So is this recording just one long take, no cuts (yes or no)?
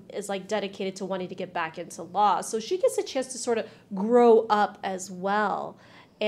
yes